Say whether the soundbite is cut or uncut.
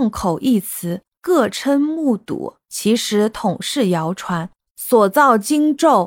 uncut